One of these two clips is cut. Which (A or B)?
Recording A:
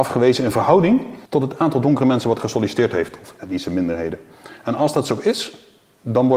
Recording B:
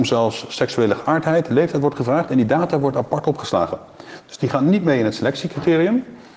A